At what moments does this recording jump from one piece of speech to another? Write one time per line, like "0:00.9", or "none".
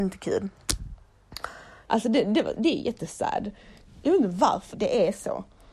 0:01.9
0:04.7

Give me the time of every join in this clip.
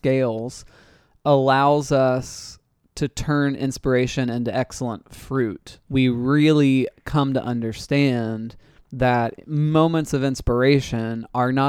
0:05.8

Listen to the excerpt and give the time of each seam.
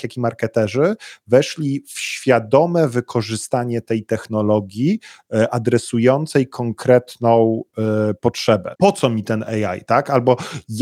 0:08.8

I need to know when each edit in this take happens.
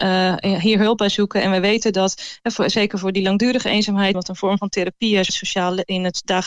0:04.1
0:05.3

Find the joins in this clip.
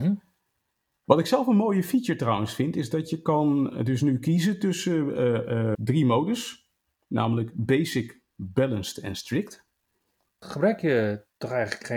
0:05.7
0:10.4

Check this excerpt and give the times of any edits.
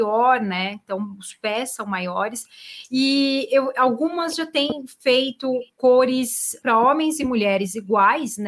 0:06.6

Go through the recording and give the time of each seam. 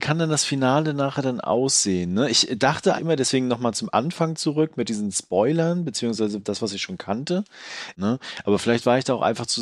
0:02.9
0:07.9

